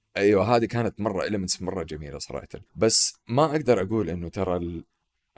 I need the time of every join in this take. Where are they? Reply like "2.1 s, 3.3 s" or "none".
2.7 s